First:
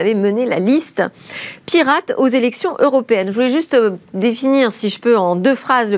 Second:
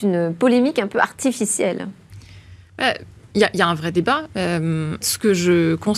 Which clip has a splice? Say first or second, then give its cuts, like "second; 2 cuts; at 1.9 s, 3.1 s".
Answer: second; 1 cut; at 5.0 s